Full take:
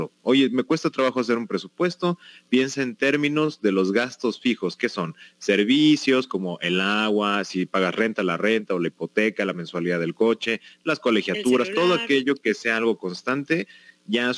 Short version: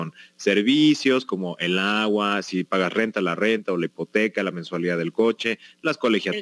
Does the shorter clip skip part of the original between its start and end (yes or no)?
no